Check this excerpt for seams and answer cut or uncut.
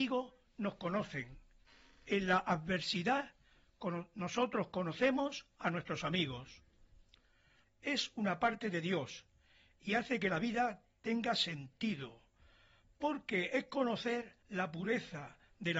cut